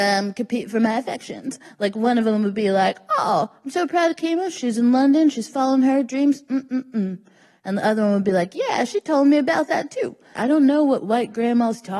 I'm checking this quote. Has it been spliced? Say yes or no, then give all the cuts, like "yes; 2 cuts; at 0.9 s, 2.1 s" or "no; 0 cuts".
yes; 1 cut; at 10.4 s